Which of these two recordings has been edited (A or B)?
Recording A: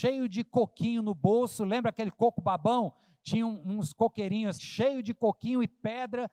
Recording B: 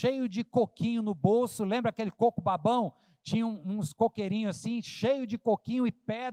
A